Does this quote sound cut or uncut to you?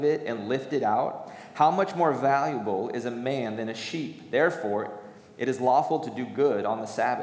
uncut